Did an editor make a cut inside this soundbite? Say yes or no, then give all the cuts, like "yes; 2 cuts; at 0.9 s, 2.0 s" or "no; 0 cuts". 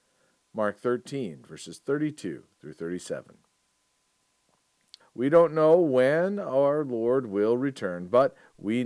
yes; 1 cut; at 5.0 s